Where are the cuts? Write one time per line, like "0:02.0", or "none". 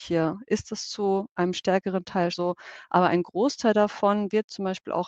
0:02.3